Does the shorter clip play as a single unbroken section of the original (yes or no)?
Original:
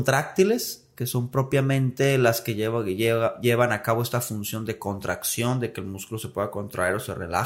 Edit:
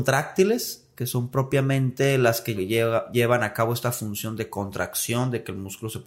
no